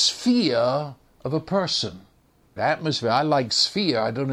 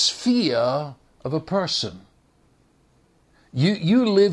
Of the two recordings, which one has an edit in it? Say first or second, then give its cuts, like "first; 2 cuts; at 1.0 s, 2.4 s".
first; 1 cut; at 2.6 s